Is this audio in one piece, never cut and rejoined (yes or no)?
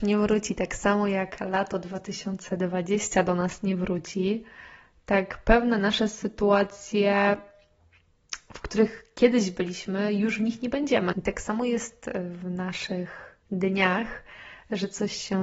no